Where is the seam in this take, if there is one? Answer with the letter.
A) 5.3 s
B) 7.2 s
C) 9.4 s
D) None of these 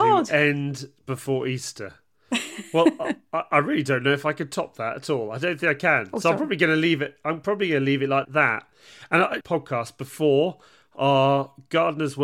C